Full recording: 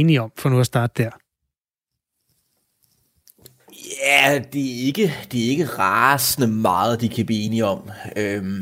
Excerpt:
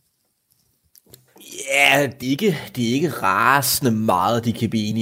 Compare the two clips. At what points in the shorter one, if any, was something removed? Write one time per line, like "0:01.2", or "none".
0:02.2